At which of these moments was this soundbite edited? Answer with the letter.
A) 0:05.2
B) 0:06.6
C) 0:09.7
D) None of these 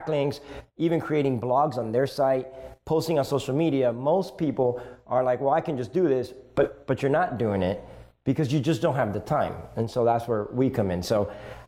D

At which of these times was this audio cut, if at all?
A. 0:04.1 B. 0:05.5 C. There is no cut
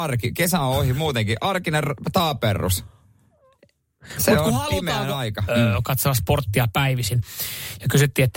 B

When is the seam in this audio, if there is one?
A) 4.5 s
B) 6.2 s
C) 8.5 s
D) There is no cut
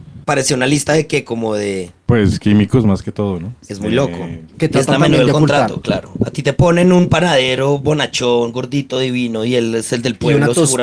A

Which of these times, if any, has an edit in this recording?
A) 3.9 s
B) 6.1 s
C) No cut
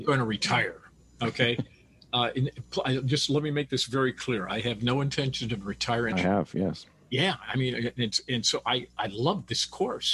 B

